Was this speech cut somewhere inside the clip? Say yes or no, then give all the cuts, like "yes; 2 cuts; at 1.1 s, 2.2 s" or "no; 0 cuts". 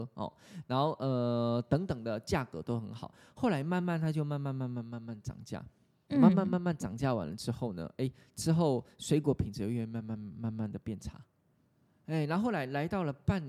no; 0 cuts